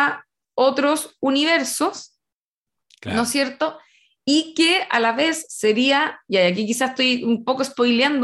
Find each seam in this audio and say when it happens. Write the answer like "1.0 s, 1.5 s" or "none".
none